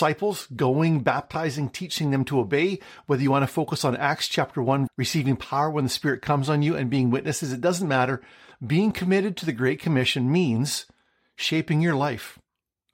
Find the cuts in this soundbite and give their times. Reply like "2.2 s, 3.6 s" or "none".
4.9 s, 8.5 s